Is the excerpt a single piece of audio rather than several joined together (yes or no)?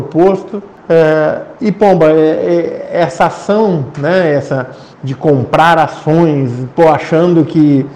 no